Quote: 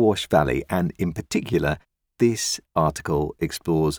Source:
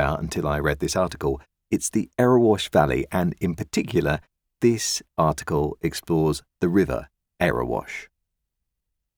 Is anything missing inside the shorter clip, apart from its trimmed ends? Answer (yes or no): no